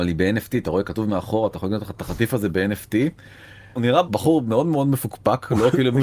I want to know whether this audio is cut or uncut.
uncut